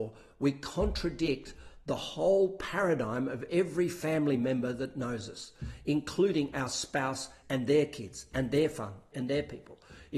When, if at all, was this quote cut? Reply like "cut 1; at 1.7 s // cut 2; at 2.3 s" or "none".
cut 1; at 7.4 s // cut 2; at 9.1 s

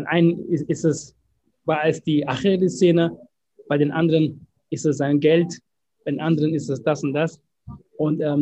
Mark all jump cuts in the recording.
none

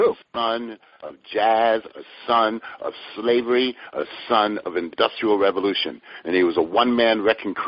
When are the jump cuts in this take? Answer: none

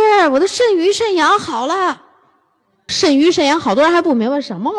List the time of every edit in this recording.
cut 1; at 2.9 s

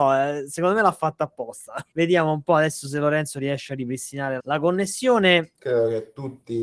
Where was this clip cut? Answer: cut 1; at 1.9 s // cut 2; at 4.4 s // cut 3; at 5.6 s

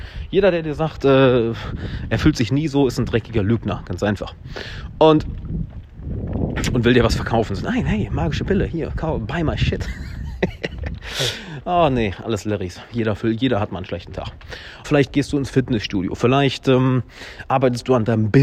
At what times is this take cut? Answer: cut 1; at 14.8 s

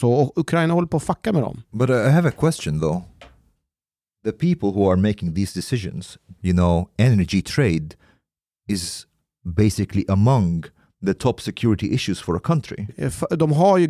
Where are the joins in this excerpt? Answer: cut 1; at 6.4 s // cut 2; at 12.9 s

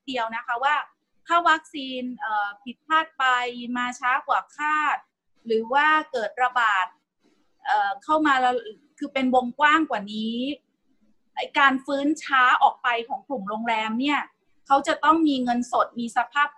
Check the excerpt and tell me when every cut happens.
none

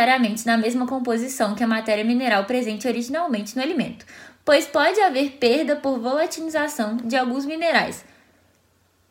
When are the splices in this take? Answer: none

